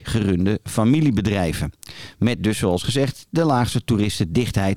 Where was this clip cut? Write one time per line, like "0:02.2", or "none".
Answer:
none